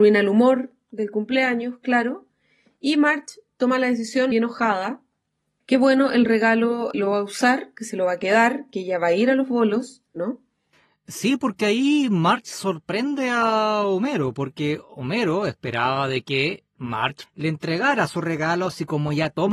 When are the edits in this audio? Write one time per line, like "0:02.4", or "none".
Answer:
0:04.3
0:10.2